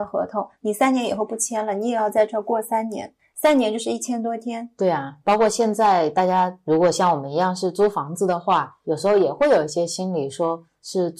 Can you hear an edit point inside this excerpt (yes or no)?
no